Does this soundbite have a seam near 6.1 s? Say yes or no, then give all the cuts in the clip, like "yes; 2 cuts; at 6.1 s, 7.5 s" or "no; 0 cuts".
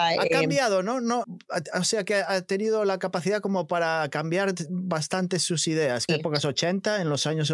yes; 2 cuts; at 1.2 s, 6.1 s